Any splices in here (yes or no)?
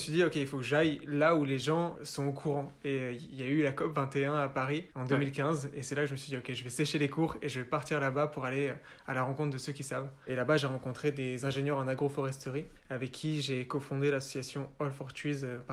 no